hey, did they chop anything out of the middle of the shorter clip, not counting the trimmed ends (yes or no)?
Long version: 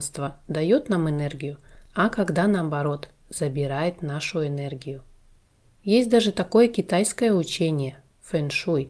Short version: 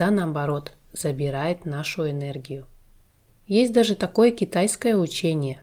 no